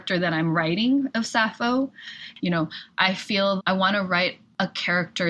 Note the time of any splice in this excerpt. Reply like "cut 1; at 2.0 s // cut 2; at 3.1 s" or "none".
cut 1; at 2.4 s // cut 2; at 3.6 s